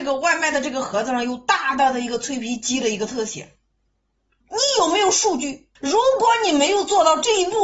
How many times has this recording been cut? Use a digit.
2